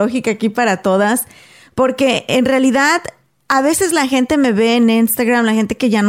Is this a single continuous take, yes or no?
yes